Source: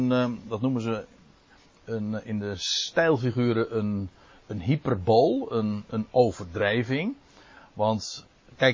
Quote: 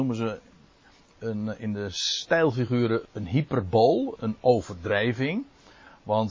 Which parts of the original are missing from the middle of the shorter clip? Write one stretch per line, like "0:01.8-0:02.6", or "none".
0:03.7-0:04.4
0:05.5-0:05.9